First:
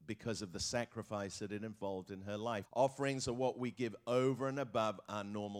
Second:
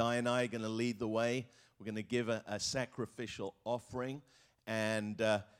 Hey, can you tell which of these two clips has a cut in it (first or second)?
first